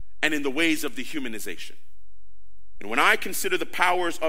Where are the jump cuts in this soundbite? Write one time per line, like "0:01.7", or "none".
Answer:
0:02.8